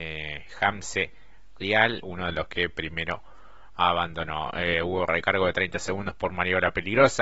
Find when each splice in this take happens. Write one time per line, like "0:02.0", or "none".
0:02.0